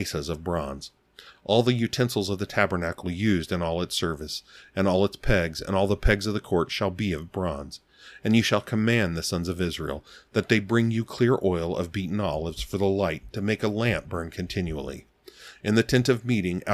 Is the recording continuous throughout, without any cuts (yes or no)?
yes